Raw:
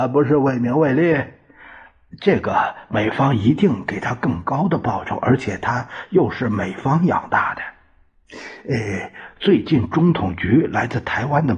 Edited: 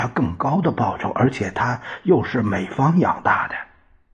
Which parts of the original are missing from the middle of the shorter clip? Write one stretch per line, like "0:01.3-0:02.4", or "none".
none